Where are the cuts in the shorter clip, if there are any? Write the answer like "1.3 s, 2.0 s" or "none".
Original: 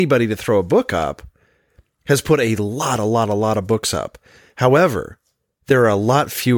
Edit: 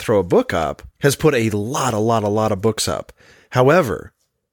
0.9 s